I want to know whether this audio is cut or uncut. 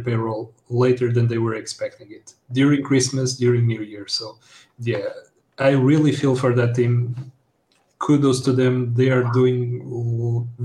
uncut